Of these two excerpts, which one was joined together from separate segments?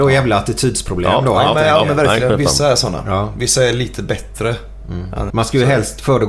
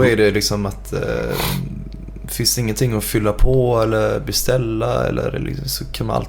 first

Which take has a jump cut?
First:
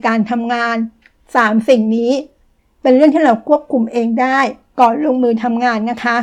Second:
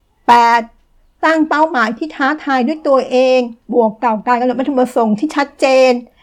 second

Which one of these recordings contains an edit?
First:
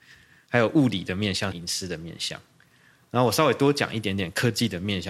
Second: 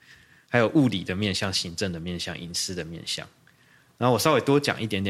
first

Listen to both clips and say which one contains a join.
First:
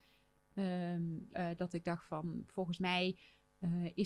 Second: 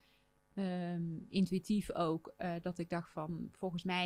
first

